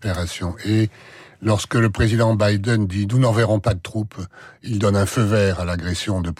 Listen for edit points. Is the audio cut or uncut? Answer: uncut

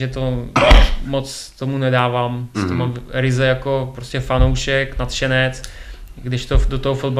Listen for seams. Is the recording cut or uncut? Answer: cut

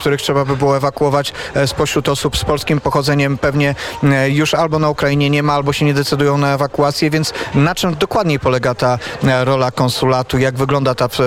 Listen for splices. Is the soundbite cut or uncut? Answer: uncut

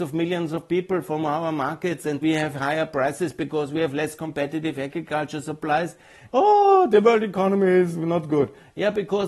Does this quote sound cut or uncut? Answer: cut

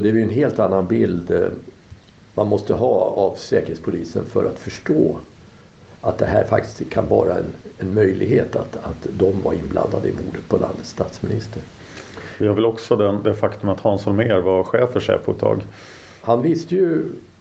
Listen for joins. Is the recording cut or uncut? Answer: uncut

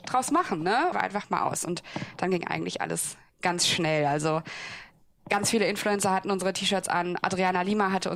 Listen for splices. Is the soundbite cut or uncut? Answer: cut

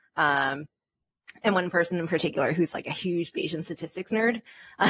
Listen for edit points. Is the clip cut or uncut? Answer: uncut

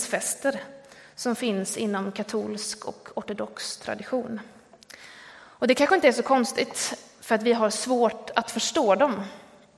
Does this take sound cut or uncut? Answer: uncut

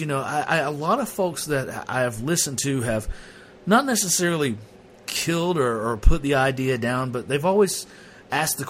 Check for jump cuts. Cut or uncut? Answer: uncut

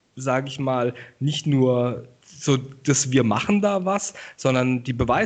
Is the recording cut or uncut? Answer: uncut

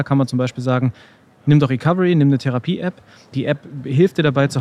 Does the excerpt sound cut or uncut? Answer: uncut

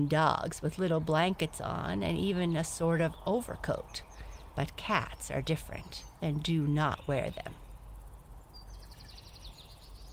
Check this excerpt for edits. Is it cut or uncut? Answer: uncut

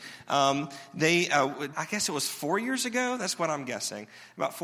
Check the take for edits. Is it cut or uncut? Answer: cut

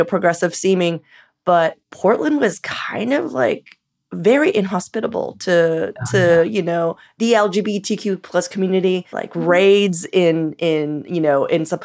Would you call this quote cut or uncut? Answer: cut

